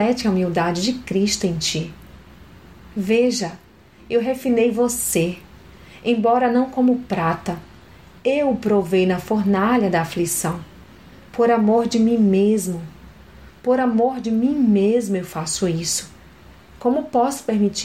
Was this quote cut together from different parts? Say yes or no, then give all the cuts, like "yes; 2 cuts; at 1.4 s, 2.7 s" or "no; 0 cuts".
no; 0 cuts